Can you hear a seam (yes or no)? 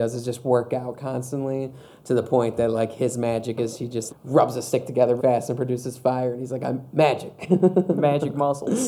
yes